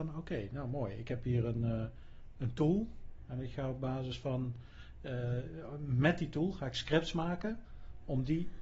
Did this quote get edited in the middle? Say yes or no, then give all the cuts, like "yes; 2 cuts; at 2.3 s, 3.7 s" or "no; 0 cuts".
no; 0 cuts